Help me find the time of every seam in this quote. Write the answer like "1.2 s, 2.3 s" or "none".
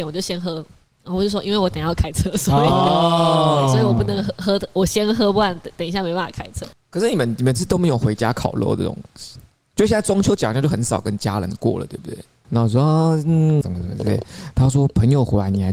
6.7 s, 12.4 s, 13.6 s